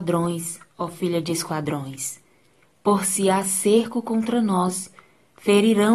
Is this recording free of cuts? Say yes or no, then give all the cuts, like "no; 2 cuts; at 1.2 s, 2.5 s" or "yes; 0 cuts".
yes; 0 cuts